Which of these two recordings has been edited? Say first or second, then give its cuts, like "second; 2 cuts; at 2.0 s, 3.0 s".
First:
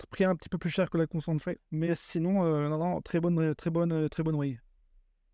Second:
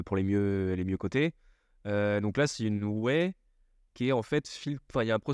first; 1 cut; at 1.6 s